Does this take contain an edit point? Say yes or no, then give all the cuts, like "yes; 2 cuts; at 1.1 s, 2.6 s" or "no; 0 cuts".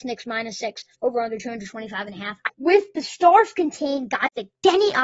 yes; 2 cuts; at 0.9 s, 2.5 s